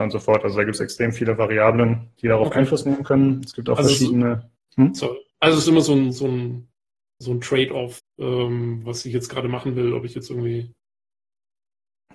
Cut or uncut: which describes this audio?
uncut